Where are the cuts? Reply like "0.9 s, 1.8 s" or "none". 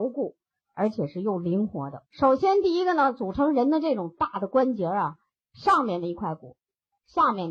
2.1 s, 5.4 s